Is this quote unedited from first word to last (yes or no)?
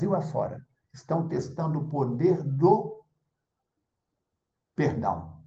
yes